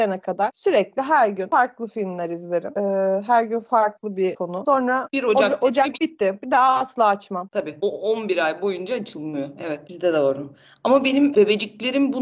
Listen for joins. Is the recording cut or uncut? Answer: uncut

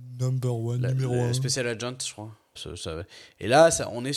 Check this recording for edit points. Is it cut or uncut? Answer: cut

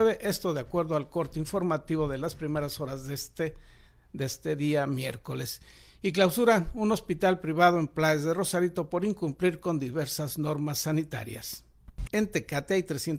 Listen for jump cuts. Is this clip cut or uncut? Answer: cut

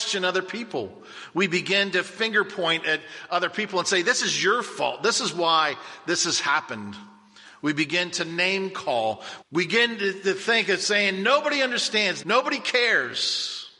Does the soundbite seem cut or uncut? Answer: cut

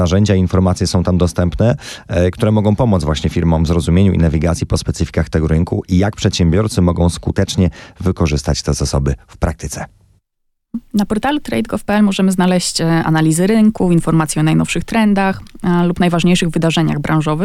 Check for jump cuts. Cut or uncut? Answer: uncut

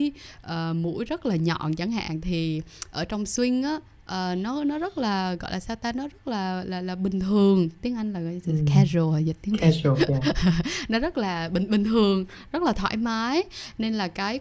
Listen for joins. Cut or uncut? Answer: uncut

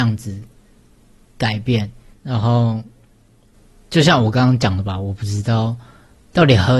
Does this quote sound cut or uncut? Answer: cut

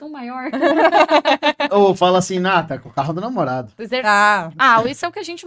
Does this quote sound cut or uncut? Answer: uncut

